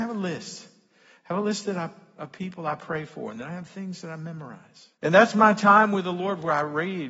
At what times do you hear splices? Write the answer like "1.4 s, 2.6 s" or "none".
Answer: 5.0 s